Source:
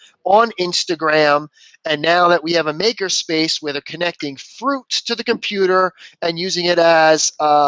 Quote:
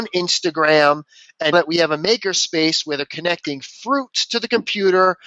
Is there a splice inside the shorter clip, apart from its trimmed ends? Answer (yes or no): yes